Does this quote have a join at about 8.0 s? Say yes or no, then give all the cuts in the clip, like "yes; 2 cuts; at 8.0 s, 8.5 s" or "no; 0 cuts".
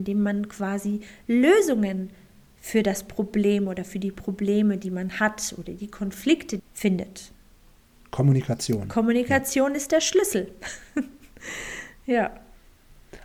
no; 1 cut; at 6.6 s